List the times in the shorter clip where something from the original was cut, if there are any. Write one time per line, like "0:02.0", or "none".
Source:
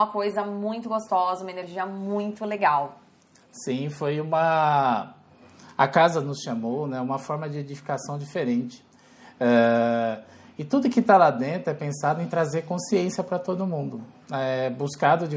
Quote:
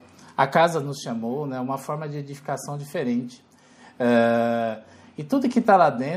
none